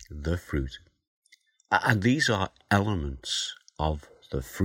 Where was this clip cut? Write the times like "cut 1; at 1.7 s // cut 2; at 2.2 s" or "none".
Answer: none